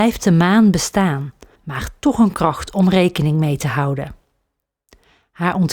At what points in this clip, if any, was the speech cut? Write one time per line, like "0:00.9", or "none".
0:01.5

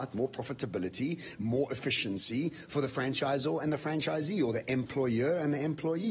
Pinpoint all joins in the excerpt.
none

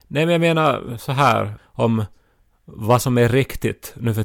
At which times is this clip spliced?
0:01.6

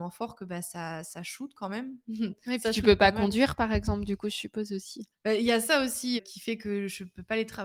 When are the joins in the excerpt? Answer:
0:05.1
0:06.2

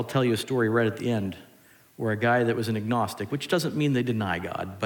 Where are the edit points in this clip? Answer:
none

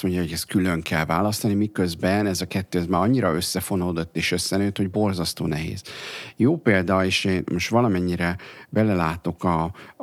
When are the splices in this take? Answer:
none

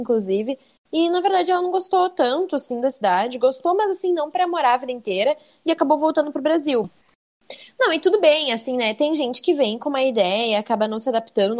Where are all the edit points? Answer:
0:06.8

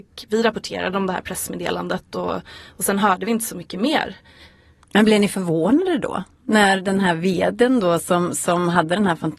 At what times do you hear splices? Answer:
none

